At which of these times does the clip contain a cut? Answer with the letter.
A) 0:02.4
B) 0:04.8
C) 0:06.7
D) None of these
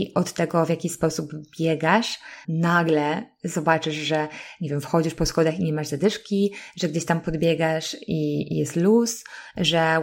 A